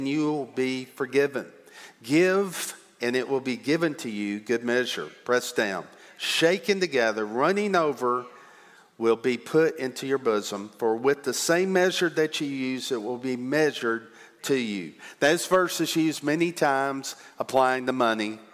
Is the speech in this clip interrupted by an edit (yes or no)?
no